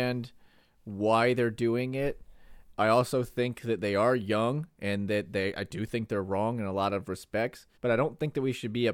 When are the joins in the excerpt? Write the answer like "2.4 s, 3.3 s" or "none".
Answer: 7.8 s